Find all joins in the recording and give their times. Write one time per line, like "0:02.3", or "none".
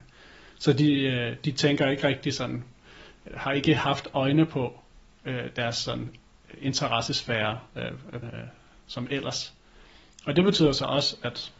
0:03.3
0:08.2